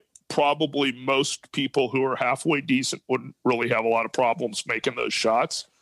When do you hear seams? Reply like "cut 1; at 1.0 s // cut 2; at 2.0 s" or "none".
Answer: none